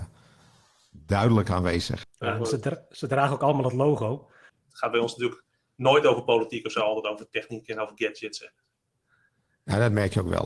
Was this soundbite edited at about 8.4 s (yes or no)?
no